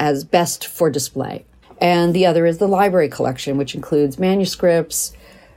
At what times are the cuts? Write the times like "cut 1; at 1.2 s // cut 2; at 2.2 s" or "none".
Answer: cut 1; at 1.6 s